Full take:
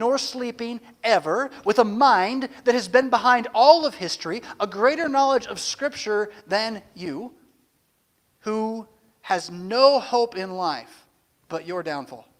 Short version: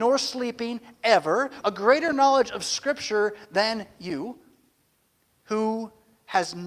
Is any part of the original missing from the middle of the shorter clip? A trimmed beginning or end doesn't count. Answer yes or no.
yes